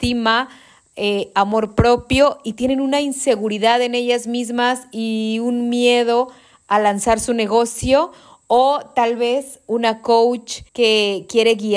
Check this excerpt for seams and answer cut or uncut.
cut